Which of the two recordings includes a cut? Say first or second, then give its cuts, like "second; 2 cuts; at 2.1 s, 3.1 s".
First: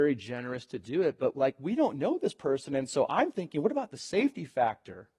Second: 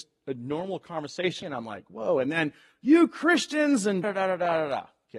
second; 2 cuts; at 1.4 s, 4.0 s